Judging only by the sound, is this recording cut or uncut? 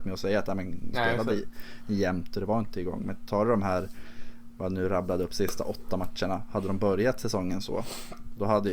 cut